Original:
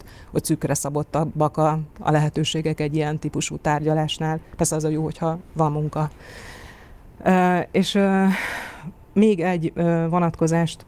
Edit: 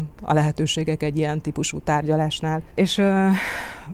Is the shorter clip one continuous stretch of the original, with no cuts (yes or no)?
no